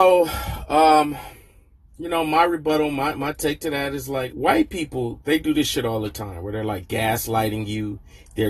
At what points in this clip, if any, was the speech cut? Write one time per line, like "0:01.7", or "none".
0:04.3